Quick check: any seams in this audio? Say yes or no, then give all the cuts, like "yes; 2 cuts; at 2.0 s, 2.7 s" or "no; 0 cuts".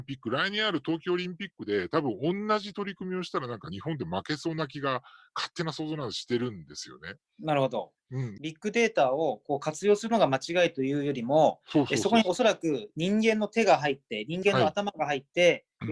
no; 0 cuts